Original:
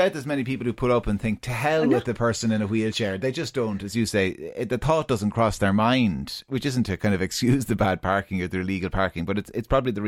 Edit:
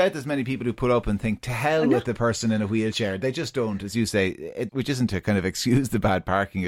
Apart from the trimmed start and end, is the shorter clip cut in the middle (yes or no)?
yes